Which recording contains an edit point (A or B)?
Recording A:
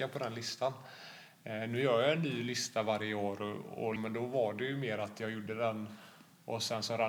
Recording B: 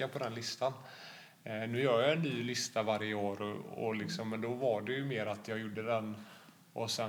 A